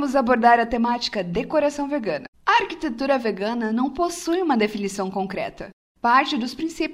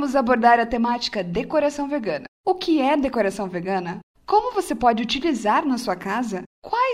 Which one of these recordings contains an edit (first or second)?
first